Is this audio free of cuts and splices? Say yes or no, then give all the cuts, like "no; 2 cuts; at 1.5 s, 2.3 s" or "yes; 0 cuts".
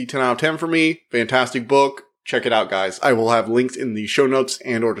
yes; 0 cuts